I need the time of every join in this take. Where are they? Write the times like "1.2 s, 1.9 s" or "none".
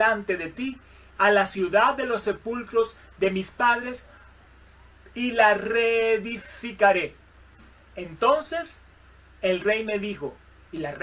1.1 s